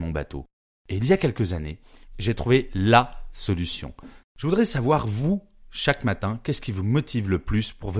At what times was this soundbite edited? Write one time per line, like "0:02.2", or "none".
0:04.2